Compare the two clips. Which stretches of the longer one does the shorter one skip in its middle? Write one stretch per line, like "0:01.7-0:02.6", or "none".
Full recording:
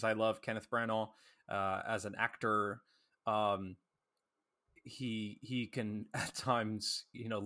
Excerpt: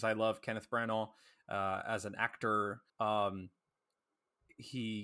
0:02.9-0:03.2

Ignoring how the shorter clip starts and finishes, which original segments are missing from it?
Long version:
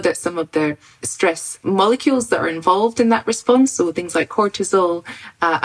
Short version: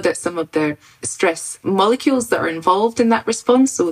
none

